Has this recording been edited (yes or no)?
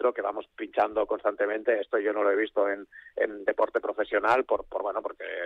no